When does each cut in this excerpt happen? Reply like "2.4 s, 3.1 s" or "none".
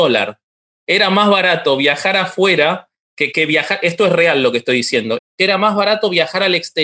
3.3 s, 5.2 s

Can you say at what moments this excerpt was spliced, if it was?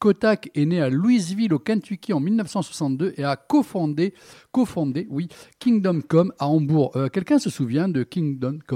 none

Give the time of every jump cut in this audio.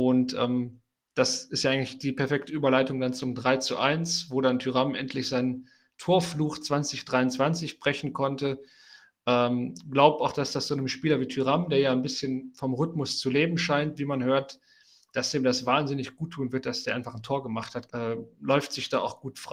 17.9 s

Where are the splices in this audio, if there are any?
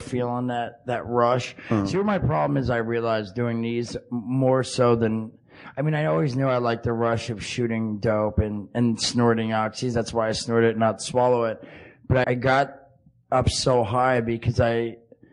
12.2 s

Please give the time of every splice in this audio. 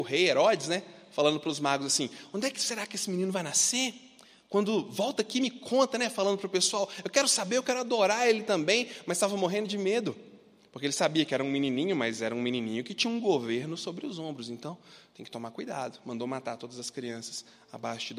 none

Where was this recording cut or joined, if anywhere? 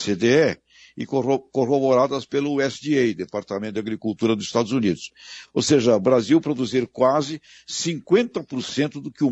none

